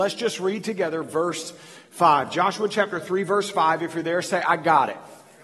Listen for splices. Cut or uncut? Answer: uncut